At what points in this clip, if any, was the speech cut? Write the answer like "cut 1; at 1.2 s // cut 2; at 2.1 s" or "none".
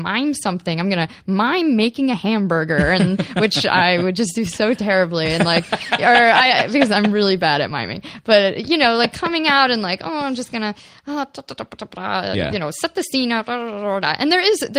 none

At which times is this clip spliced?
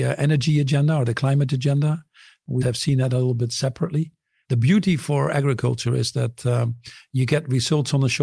cut 1; at 2.6 s // cut 2; at 4.4 s

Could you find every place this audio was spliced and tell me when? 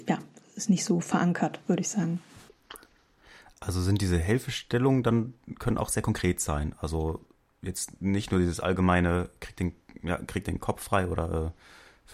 none

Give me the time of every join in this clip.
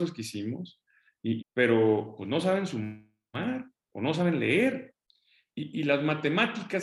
cut 1; at 1.4 s

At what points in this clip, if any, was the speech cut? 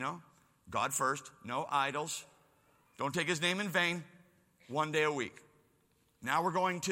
none

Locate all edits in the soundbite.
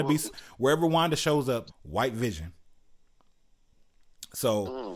cut 1; at 1.7 s

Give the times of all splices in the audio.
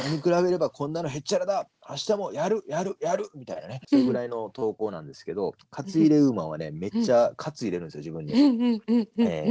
cut 1; at 3.8 s

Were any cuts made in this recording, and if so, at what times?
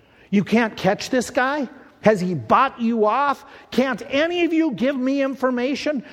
cut 1; at 2.0 s

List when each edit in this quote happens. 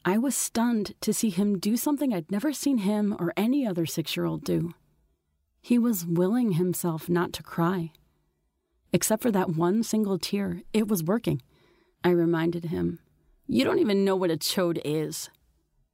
cut 1; at 11.9 s

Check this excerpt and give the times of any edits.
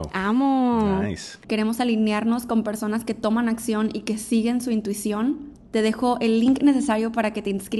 cut 1; at 1.4 s

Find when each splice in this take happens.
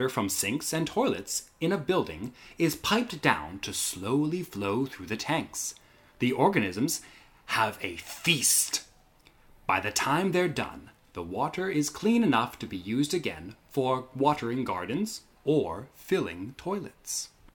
cut 1; at 15.3 s

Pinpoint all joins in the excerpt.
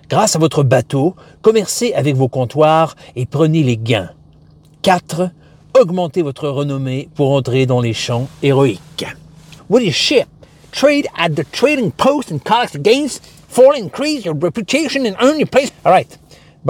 cut 1; at 9.6 s // cut 2; at 15.7 s

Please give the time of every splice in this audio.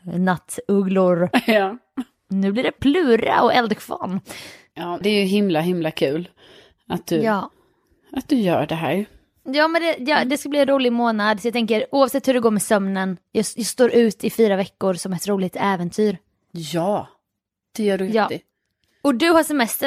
cut 1; at 5.0 s

